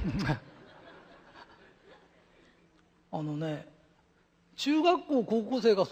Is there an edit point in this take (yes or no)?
no